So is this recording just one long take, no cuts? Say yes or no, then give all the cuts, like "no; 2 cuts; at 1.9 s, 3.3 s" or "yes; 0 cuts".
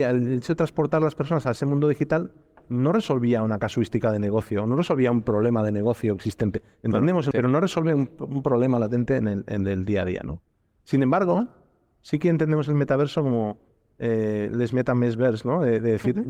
no; 1 cut; at 7.3 s